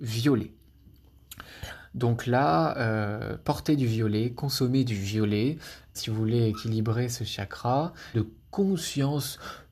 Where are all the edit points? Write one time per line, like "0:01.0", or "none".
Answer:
0:05.9
0:08.1

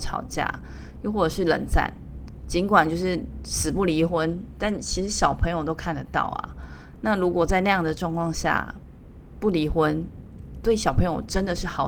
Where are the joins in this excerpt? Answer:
none

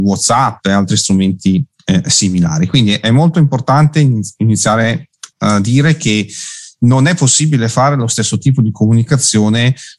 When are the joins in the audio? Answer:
0:05.3

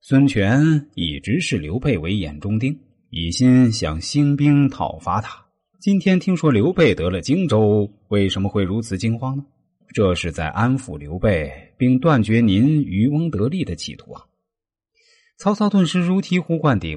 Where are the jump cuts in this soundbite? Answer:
0:05.4
0:09.8

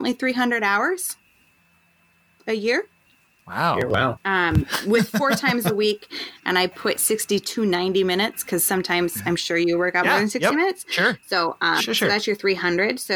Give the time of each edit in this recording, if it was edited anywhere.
0:04.2
0:11.8

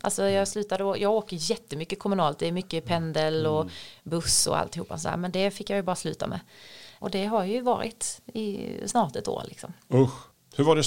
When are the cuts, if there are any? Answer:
0:07.0

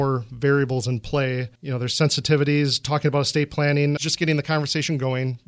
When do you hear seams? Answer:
0:01.6
0:04.0

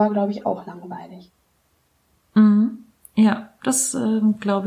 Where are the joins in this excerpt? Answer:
none

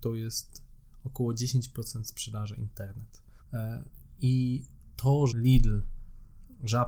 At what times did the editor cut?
0:03.4
0:05.3

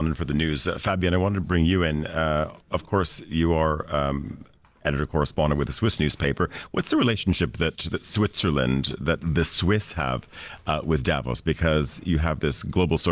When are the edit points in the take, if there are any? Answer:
0:01.4

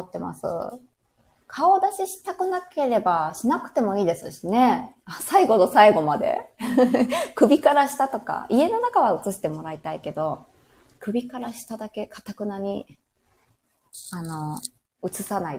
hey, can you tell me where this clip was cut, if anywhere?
none

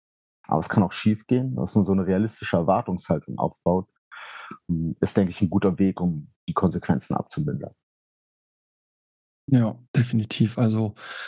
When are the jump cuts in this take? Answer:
none

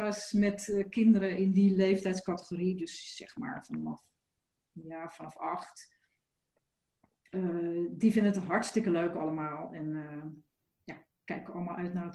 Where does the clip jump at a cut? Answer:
none

